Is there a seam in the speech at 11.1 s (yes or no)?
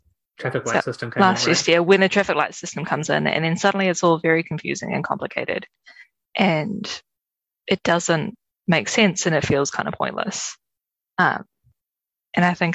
no